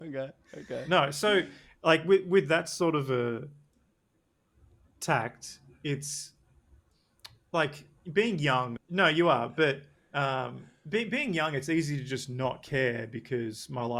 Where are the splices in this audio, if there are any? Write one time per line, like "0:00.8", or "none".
0:08.8